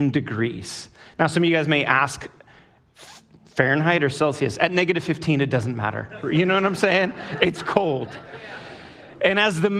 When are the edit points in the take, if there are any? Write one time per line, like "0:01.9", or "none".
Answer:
none